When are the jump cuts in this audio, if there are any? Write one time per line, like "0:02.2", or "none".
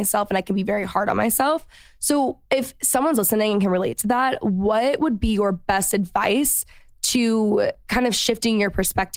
none